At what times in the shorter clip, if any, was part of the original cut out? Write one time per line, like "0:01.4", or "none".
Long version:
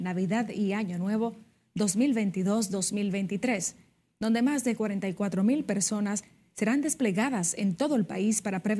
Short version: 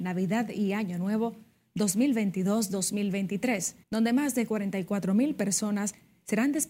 0:03.8